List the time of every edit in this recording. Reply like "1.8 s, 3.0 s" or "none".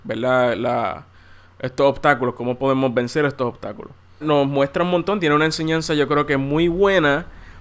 4.2 s